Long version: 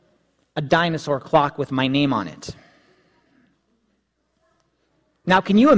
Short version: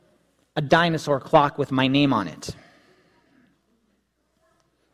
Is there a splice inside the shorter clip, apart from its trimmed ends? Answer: no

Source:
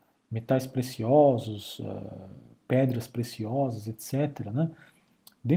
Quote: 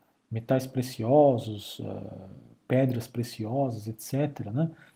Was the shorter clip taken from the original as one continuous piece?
yes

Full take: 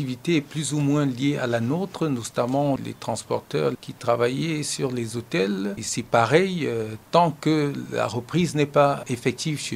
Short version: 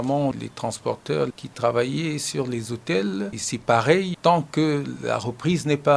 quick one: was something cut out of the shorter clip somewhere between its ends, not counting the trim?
yes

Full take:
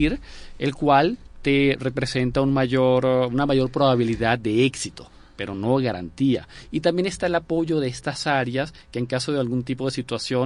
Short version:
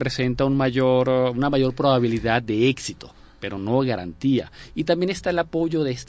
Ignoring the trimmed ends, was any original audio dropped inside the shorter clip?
no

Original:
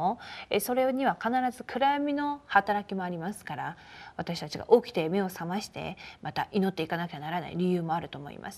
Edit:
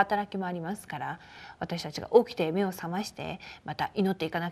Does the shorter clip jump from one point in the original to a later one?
no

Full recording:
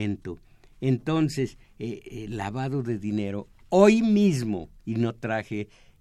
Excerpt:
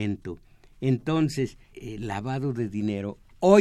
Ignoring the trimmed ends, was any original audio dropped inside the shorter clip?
yes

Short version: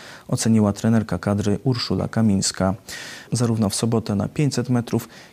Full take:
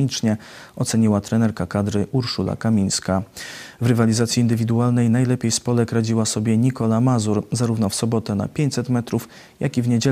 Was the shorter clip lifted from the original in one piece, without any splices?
no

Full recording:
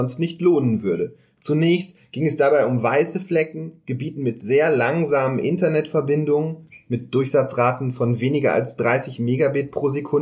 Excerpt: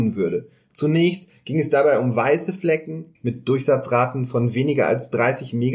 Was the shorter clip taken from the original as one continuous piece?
no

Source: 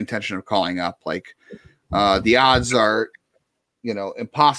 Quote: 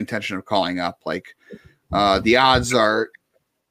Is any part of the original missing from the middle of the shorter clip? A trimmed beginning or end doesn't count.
no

